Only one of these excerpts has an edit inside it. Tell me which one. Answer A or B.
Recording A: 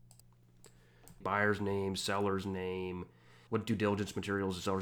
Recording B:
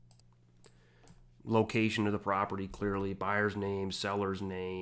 A